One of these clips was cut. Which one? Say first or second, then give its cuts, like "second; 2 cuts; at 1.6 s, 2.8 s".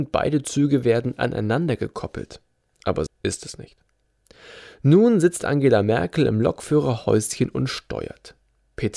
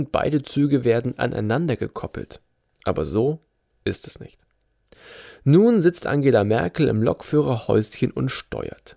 first; 1 cut; at 3.1 s